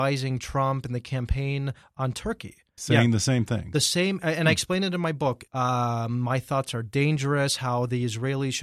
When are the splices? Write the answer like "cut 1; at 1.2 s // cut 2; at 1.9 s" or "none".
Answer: cut 1; at 2.8 s // cut 2; at 5.5 s